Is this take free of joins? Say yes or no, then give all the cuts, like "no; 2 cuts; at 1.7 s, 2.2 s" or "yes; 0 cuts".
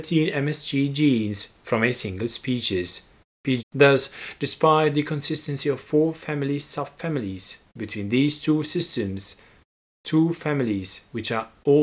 no; 1 cut; at 3.6 s